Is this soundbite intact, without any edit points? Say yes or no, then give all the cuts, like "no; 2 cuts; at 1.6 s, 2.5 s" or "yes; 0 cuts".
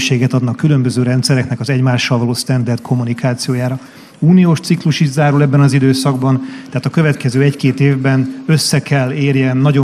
yes; 0 cuts